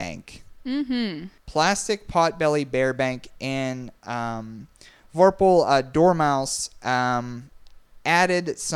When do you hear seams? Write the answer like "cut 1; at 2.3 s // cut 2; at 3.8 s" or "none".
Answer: cut 1; at 1.4 s